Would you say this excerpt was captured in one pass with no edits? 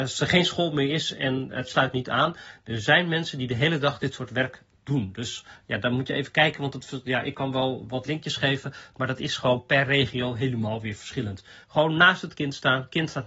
no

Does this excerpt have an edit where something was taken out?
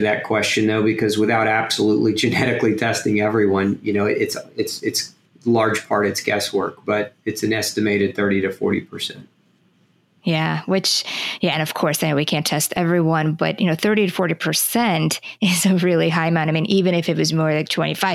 no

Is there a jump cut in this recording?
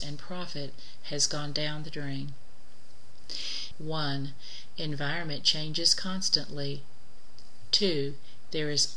yes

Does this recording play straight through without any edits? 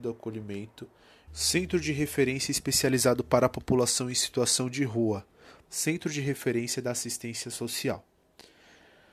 no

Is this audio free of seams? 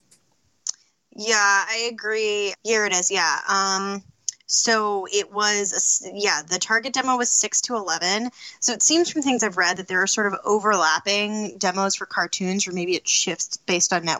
no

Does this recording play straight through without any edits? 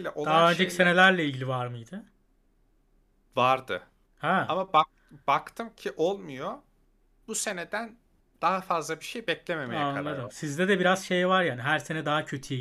yes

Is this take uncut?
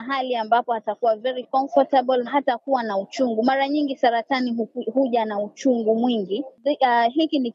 no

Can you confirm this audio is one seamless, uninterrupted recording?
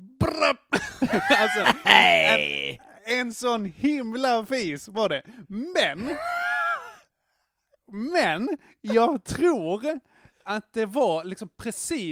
yes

